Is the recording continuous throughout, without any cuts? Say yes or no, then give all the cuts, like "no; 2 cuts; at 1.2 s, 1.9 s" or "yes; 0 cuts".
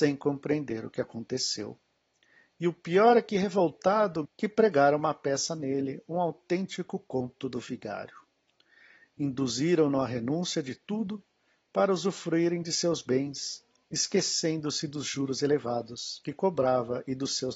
no; 2 cuts; at 4.2 s, 13.8 s